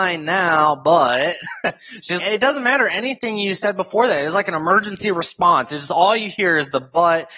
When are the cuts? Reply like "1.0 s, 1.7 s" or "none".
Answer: 2.2 s